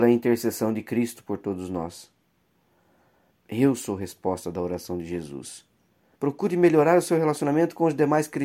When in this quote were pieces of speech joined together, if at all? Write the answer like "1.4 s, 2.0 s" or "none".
3.3 s, 6.1 s